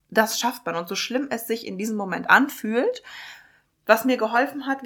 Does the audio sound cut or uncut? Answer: uncut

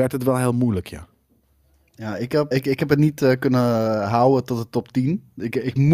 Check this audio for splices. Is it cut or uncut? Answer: cut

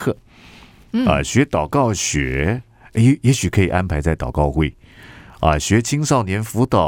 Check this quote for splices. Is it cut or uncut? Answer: uncut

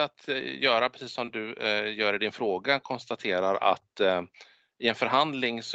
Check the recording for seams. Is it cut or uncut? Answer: uncut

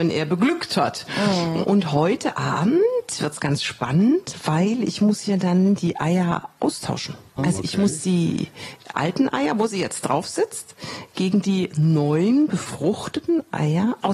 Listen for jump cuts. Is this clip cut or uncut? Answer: cut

